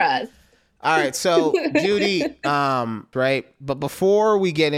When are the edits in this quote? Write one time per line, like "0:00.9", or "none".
0:03.1